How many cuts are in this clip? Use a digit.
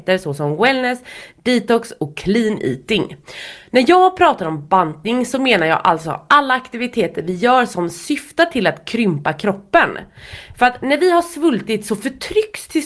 0